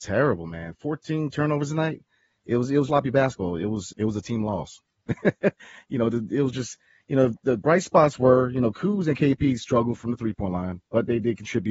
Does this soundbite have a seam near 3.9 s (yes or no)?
yes